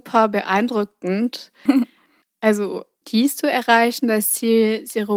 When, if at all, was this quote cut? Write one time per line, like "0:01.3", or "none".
0:01.7
0:03.0